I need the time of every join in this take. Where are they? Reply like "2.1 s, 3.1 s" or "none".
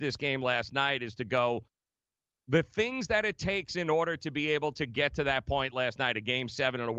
none